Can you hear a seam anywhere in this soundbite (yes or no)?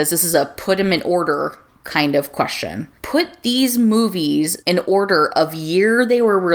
yes